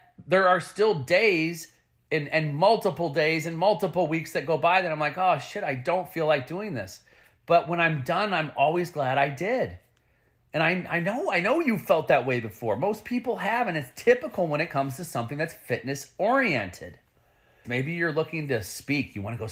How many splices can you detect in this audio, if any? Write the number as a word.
one